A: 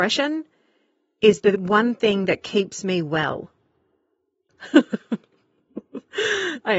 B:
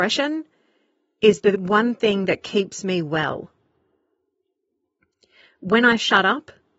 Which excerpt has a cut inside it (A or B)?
A